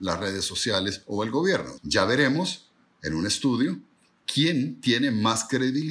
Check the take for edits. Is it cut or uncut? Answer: cut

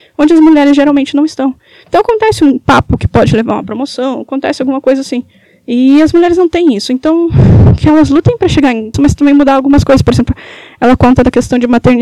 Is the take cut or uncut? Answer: cut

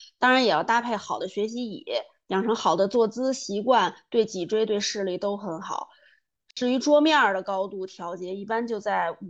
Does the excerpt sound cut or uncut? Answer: uncut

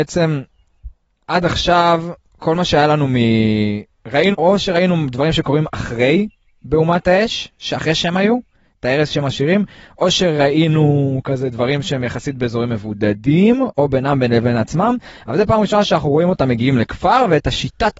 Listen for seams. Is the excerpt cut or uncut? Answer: cut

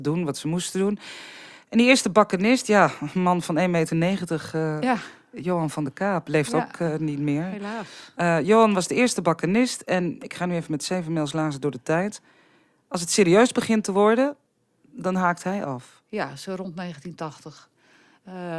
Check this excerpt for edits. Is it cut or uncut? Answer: uncut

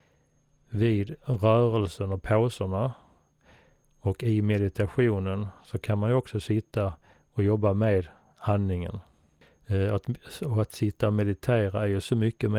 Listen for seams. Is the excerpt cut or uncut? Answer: uncut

